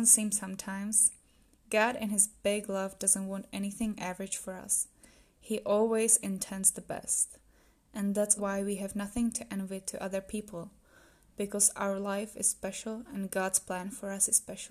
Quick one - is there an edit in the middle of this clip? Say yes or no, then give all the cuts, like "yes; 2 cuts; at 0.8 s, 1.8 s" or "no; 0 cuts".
yes; 1 cut; at 8.4 s